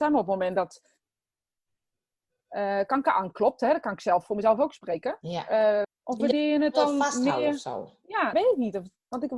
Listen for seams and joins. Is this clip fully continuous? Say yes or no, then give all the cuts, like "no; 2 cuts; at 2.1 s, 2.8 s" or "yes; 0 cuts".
no; 2 cuts; at 5.8 s, 8.3 s